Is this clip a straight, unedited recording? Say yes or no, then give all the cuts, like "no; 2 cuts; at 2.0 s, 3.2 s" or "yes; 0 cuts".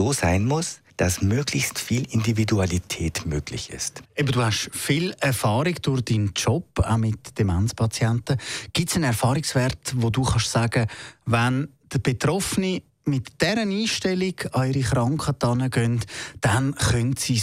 no; 1 cut; at 0.9 s